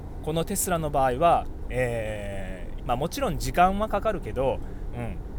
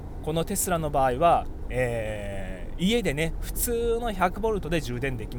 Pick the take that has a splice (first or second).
first